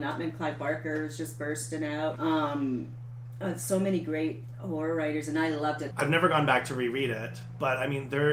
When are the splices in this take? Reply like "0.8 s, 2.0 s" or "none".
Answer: 2.2 s, 5.9 s